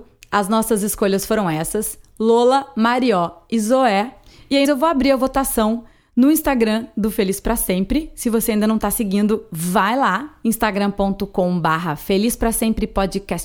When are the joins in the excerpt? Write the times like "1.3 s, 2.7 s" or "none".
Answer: 4.6 s